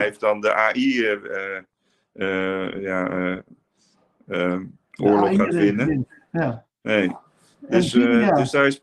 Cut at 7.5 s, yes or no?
no